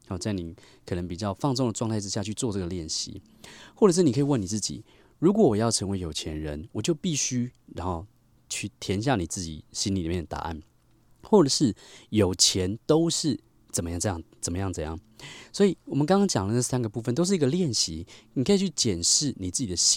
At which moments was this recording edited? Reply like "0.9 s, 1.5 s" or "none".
none